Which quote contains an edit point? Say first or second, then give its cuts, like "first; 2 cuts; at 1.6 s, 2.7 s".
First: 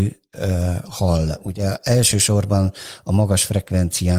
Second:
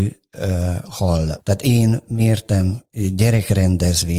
second; 1 cut; at 1.4 s